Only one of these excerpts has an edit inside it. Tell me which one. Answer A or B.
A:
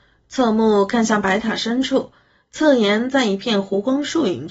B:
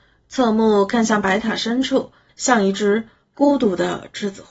B